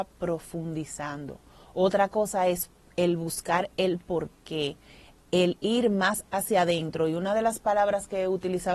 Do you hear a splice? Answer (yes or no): no